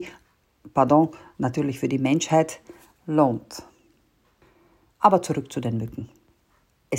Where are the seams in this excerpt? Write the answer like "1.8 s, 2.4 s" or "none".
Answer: none